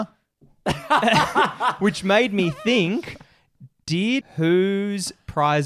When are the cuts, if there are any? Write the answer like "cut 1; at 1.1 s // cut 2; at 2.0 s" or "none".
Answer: cut 1; at 4.2 s